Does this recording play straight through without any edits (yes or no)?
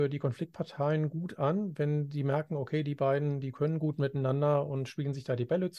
yes